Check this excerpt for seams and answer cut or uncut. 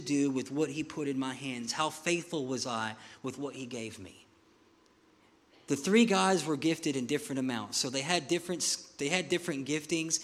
uncut